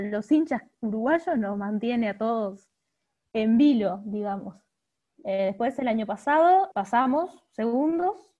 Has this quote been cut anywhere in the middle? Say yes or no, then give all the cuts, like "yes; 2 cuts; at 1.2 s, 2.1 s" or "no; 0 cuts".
yes; 2 cuts; at 5.2 s, 6.7 s